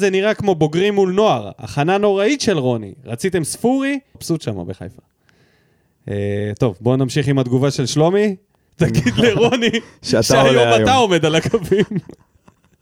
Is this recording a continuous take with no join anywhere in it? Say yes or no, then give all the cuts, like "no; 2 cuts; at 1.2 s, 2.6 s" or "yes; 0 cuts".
no; 2 cuts; at 4.1 s, 8.7 s